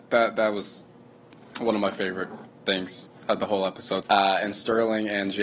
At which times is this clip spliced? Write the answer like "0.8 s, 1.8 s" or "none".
4.0 s